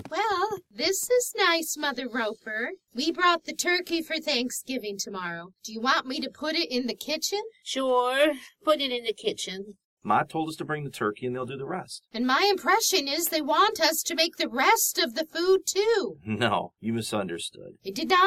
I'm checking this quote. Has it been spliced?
yes; 2 cuts; at 10.0 s, 12.1 s

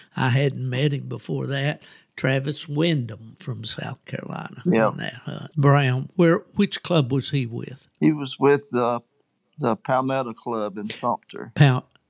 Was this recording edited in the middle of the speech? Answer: yes; 1 cut; at 5.5 s

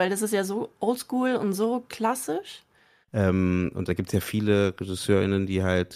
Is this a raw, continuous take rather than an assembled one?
no; 1 cut; at 3.0 s

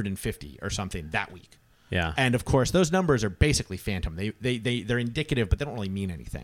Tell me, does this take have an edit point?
no; 0 cuts

